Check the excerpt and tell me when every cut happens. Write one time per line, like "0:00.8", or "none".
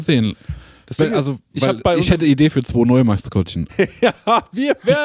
0:03.7